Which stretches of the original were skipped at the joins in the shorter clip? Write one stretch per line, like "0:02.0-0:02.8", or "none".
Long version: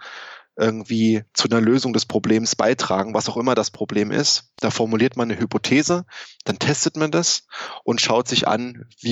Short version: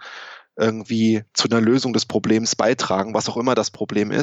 none